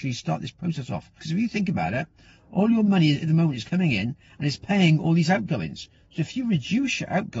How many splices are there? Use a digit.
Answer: 1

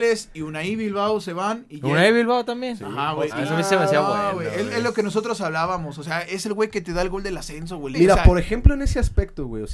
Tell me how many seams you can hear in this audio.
2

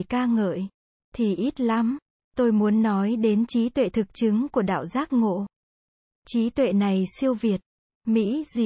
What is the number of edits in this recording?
0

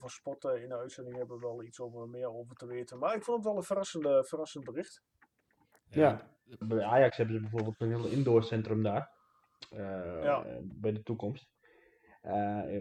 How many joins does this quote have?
1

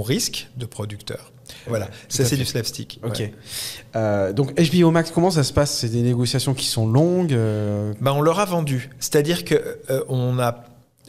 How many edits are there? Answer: 1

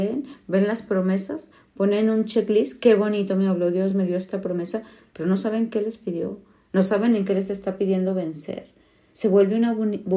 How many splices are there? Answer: 0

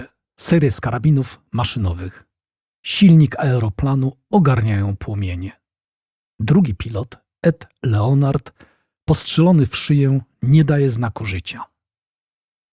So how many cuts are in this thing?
0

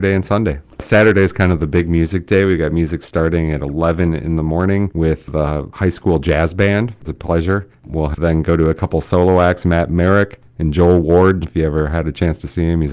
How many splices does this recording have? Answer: 2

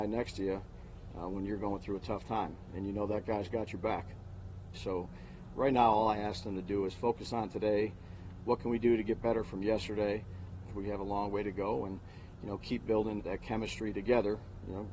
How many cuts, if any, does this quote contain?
3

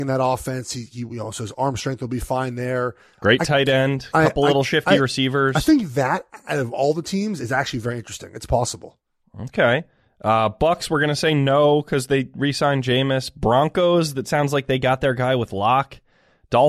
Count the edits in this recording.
0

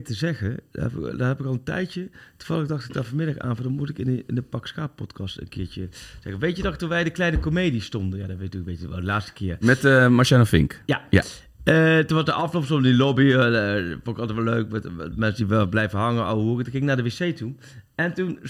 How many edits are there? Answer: 0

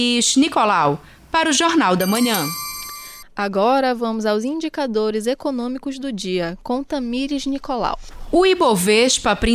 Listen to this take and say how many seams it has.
1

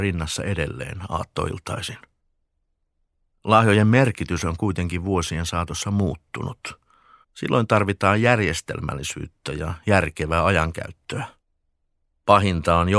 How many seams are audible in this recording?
1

